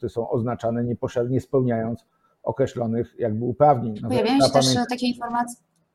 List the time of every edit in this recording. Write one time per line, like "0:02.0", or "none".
0:04.0